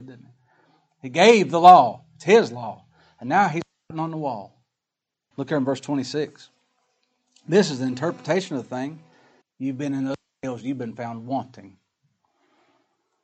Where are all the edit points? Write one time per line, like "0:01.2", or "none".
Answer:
0:05.3
0:09.4